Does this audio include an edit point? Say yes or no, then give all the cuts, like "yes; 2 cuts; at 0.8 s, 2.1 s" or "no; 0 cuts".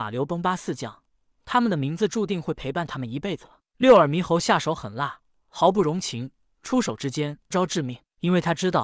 yes; 1 cut; at 7.5 s